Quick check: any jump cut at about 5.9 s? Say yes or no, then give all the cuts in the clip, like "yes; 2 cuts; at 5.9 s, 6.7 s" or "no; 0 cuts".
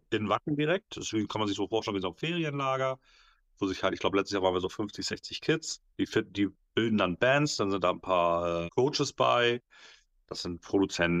yes; 2 cuts; at 5.9 s, 8.7 s